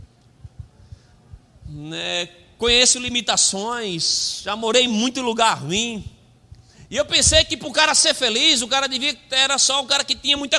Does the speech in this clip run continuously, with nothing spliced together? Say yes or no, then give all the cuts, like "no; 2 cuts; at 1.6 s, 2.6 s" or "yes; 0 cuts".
yes; 0 cuts